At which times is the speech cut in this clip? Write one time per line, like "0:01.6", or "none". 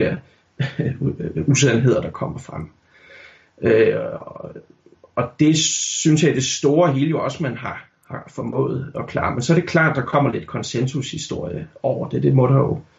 none